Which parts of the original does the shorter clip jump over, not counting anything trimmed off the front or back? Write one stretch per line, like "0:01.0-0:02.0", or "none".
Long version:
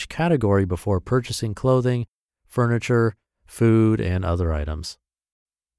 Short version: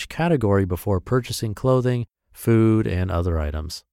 0:02.1-0:03.3